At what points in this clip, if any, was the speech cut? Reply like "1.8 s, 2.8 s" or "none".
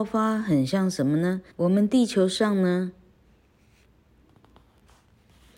1.5 s